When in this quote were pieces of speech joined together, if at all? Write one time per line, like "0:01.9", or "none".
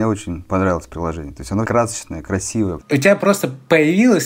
0:01.6
0:02.8